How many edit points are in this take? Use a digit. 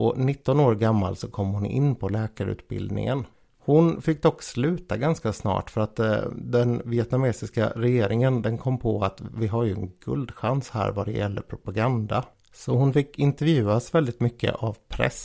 0